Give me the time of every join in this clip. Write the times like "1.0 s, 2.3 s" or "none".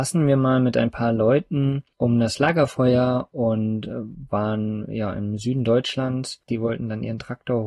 6.5 s